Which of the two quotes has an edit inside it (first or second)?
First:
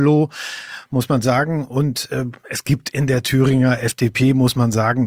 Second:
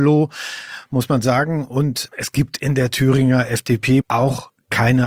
second